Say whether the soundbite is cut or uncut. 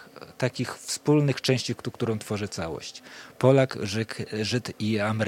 uncut